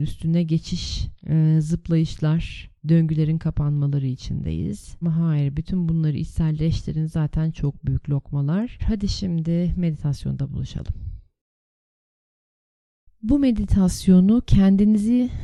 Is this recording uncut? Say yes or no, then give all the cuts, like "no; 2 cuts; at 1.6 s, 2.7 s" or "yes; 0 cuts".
no; 2 cuts; at 5.0 s, 8.8 s